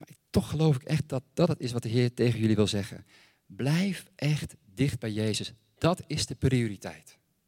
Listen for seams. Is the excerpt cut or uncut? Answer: uncut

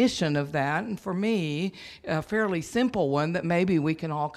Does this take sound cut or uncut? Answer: uncut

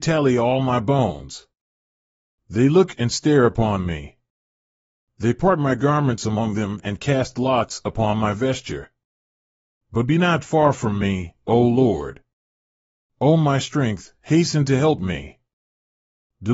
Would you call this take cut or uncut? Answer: uncut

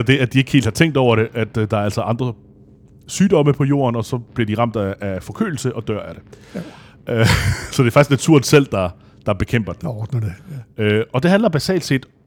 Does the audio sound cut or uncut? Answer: uncut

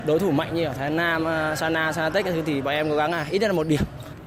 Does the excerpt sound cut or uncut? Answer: uncut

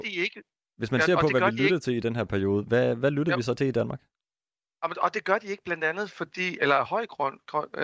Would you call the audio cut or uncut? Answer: uncut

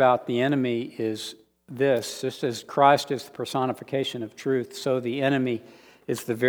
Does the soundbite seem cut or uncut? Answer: uncut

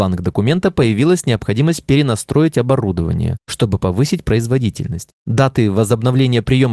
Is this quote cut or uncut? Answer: uncut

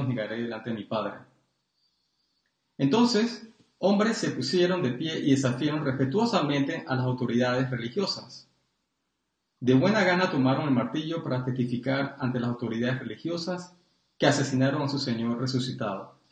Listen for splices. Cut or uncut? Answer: uncut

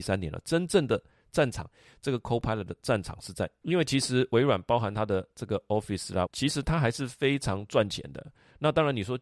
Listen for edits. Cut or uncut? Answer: cut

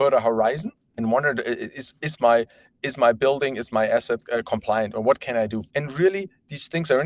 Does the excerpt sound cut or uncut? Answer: cut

